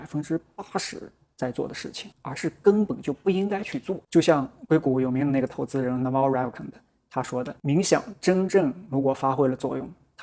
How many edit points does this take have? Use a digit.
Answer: 1